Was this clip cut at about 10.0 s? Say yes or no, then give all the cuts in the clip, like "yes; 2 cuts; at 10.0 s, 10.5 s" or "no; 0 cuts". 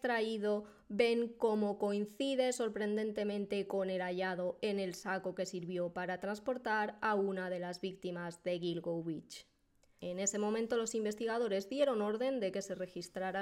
yes; 1 cut; at 10.0 s